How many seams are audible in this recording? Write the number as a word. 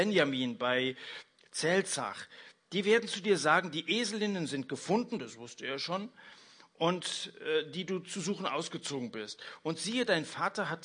zero